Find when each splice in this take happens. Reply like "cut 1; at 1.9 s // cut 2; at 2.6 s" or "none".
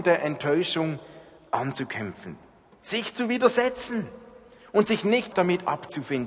cut 1; at 5.3 s